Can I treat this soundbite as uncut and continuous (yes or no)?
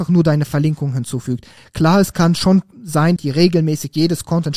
no